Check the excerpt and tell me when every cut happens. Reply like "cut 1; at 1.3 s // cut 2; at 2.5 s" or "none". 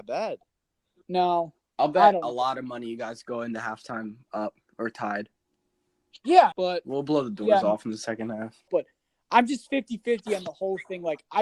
cut 1; at 6.5 s // cut 2; at 8.7 s